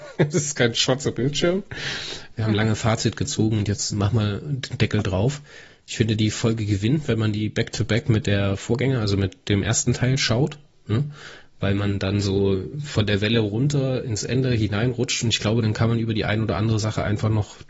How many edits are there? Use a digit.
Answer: 1